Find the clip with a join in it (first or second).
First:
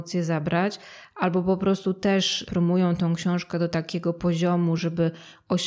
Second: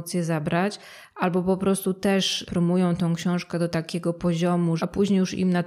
second